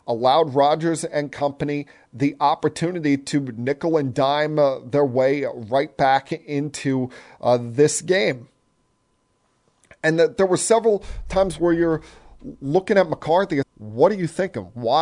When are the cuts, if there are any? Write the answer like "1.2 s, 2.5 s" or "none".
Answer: 13.6 s